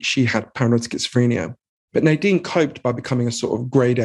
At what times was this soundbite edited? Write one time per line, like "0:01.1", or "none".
0:01.9

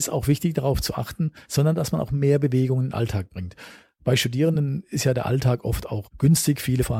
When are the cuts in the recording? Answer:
0:01.4

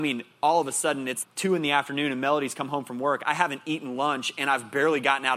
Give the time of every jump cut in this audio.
0:01.2

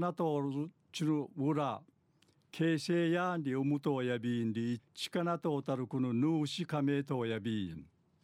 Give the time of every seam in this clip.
0:04.8

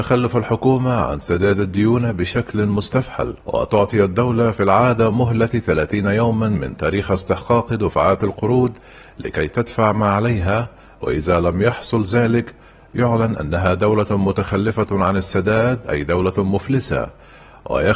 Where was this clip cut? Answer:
0:03.4

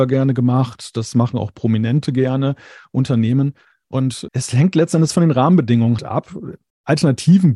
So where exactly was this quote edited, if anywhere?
0:04.3
0:06.0

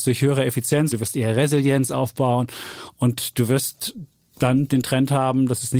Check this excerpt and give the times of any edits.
0:00.9

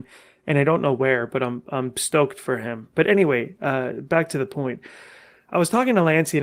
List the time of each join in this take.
none

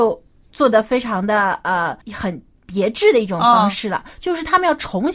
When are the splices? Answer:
0:02.0

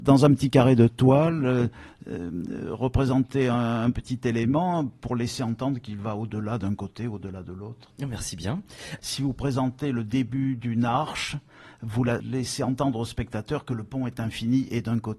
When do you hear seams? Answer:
0:07.9
0:09.0
0:12.2

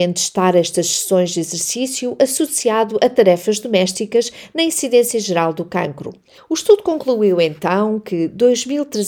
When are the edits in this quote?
0:06.4

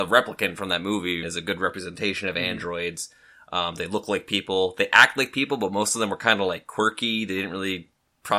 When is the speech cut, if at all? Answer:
0:01.2

